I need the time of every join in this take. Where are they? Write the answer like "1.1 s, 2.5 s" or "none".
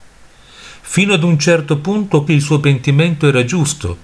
2.3 s